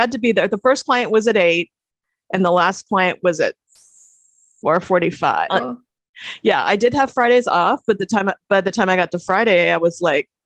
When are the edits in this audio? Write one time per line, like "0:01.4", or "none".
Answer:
0:05.5